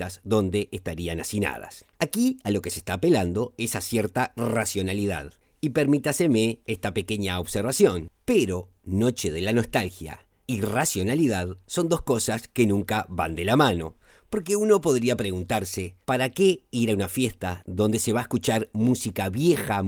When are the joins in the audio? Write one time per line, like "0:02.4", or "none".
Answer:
none